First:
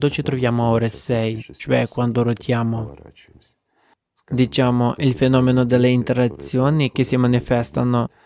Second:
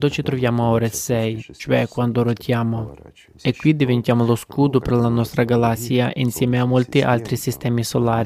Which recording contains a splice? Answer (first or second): second